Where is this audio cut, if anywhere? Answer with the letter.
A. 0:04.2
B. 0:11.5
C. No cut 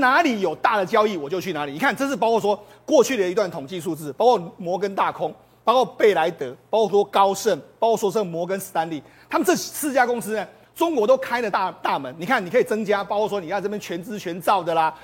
C